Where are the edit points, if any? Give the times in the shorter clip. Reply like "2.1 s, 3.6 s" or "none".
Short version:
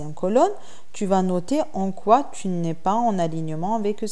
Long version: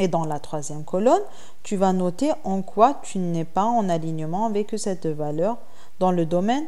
none